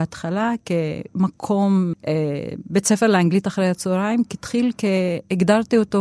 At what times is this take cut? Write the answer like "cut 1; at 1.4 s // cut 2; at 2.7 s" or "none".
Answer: cut 1; at 1.9 s